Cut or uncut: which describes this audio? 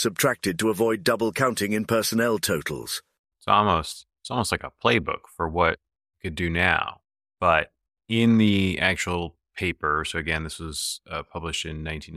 cut